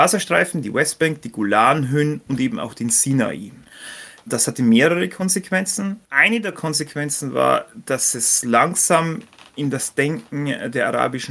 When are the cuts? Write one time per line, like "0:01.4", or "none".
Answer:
0:06.0